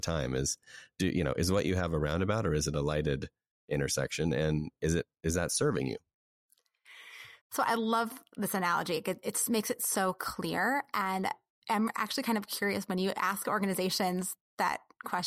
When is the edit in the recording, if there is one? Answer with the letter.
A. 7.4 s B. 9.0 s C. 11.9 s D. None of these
A